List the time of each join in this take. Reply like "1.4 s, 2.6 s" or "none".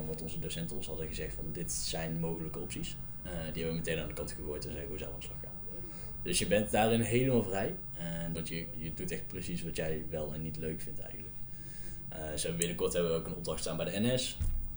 8.3 s